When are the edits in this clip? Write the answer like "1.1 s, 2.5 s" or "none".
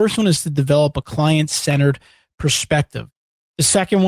none